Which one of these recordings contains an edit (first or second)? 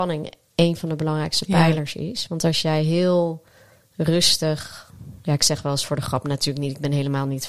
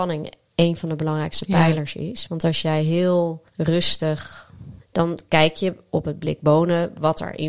second